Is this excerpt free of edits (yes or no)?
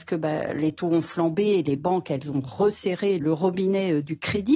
no